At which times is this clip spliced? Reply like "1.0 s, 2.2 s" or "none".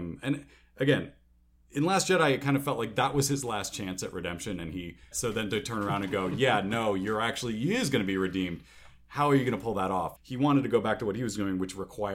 5.1 s, 10.2 s